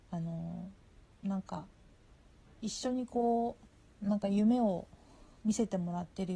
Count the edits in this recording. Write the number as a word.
zero